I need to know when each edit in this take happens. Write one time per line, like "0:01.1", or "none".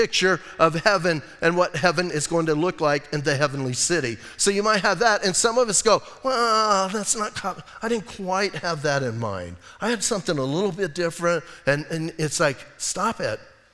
none